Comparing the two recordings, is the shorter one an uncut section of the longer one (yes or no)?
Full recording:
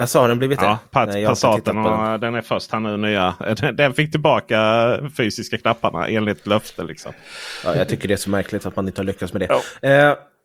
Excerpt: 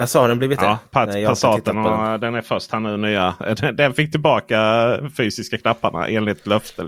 yes